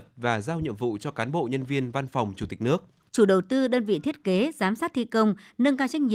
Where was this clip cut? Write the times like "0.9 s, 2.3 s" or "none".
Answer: 3.1 s